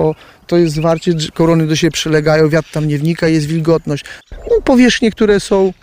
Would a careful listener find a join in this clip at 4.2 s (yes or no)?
yes